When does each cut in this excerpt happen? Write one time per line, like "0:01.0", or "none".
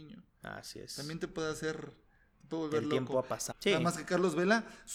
0:03.5